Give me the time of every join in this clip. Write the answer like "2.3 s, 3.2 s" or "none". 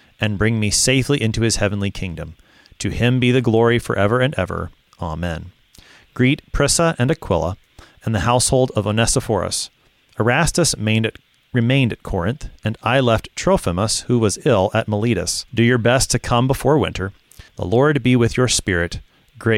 15.5 s, 17.5 s